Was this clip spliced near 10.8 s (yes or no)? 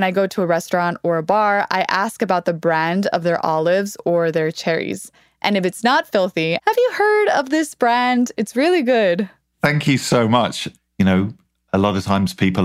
yes